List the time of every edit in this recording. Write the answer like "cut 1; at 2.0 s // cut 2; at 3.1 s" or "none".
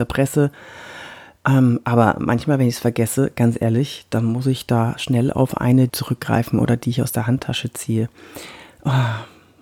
cut 1; at 5.9 s